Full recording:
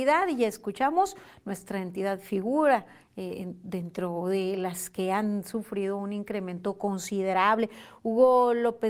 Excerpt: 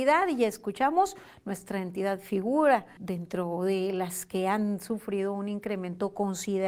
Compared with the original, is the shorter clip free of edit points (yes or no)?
no